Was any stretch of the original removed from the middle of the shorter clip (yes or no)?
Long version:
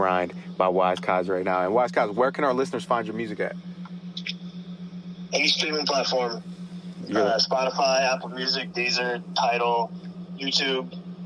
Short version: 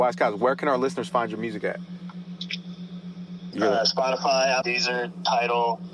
yes